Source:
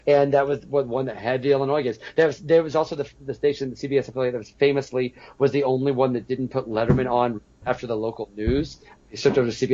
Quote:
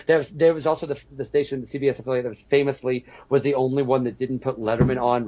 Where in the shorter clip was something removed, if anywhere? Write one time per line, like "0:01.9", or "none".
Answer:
none